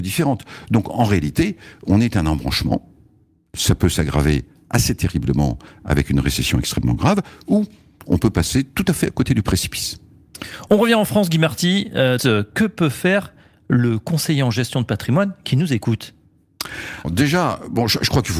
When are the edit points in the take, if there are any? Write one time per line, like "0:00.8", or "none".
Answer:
0:12.2
0:17.0